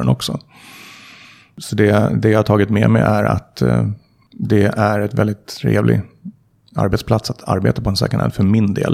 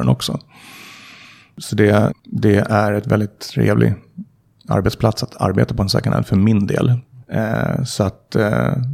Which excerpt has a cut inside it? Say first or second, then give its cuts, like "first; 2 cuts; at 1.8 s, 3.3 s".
second; 2 cuts; at 2.1 s, 7.2 s